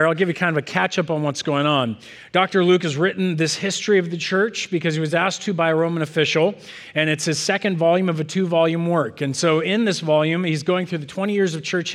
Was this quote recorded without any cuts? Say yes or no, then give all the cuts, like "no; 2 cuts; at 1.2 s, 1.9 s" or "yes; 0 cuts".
yes; 0 cuts